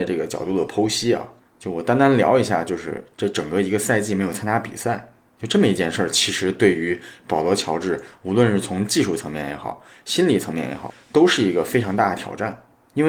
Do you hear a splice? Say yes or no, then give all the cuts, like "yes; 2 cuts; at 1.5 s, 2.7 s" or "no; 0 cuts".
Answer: no; 0 cuts